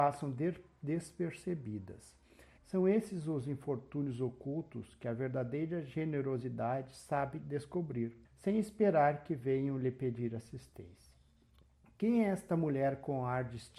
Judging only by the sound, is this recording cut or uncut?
cut